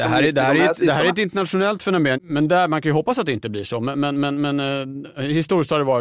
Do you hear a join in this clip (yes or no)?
yes